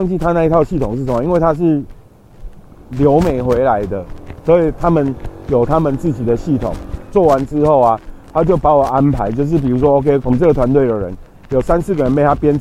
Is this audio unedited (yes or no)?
no